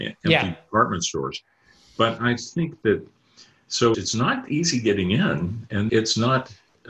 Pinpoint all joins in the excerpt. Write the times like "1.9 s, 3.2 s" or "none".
3.9 s, 5.9 s